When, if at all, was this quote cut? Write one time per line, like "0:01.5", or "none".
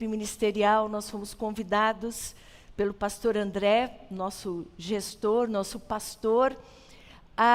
none